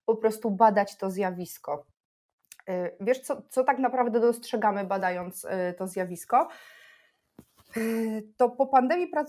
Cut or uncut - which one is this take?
uncut